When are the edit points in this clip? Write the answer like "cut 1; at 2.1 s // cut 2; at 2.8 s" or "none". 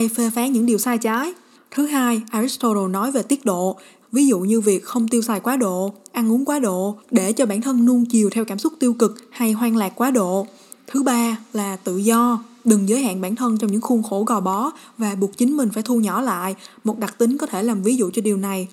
cut 1; at 4.0 s